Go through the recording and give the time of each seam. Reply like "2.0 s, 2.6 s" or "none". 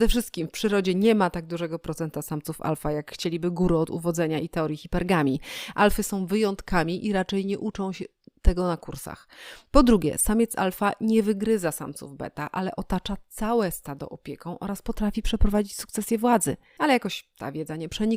none